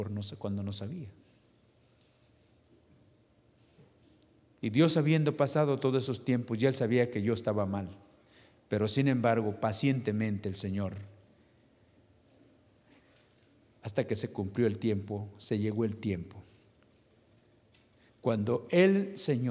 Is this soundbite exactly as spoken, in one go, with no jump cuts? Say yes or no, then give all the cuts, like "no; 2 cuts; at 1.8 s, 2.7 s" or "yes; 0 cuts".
yes; 0 cuts